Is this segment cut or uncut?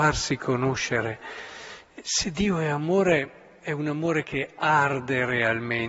uncut